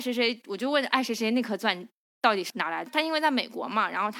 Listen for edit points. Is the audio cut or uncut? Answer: cut